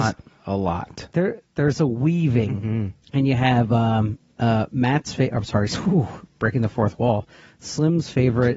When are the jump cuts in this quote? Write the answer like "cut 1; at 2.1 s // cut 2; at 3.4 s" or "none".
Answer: cut 1; at 3.0 s